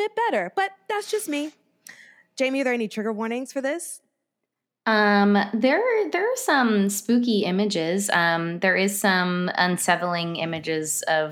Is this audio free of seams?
yes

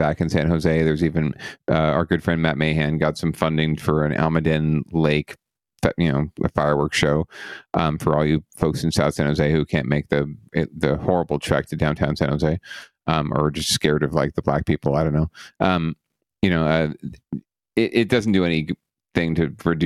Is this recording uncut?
yes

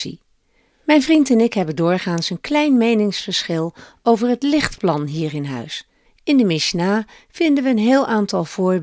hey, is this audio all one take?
no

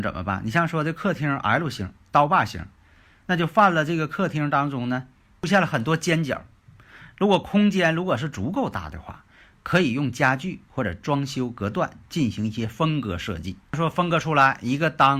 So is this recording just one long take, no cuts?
yes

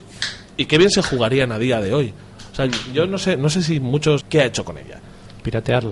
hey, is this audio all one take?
no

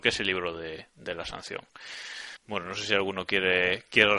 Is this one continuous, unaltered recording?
no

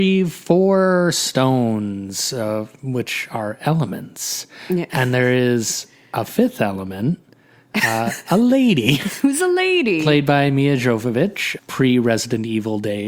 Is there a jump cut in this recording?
yes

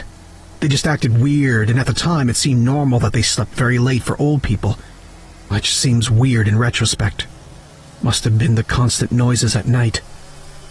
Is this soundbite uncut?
yes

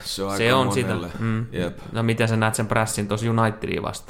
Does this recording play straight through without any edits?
yes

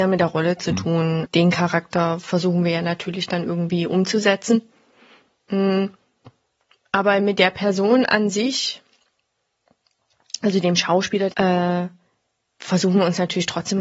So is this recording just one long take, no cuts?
no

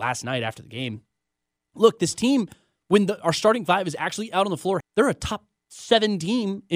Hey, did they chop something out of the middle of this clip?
yes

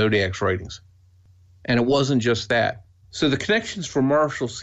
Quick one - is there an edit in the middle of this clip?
yes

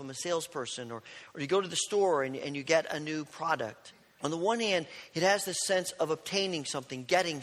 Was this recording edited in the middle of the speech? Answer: yes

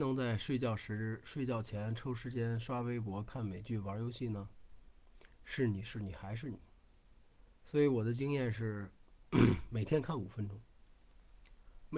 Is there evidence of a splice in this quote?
no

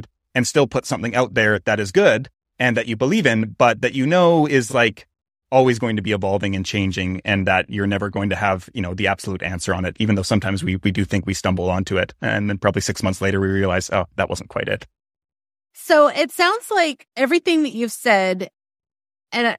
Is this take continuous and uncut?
yes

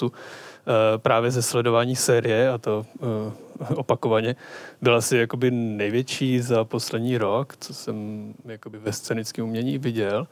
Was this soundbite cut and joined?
no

